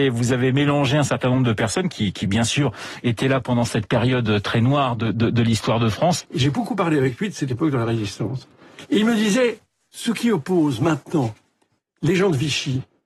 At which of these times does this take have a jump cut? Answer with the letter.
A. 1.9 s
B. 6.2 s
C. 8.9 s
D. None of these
B